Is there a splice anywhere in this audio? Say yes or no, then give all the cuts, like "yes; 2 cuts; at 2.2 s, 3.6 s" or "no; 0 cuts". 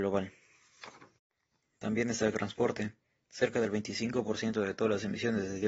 no; 0 cuts